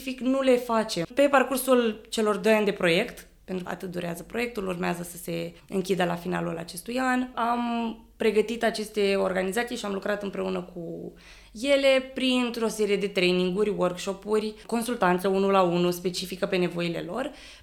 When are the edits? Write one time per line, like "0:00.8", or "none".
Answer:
0:01.0
0:03.7